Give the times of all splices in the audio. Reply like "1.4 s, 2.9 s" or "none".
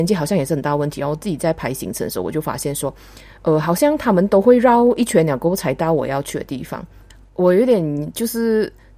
none